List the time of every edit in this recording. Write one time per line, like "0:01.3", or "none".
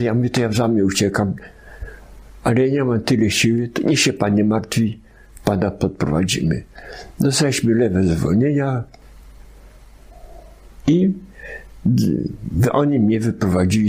none